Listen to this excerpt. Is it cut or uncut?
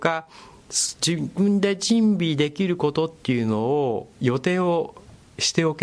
cut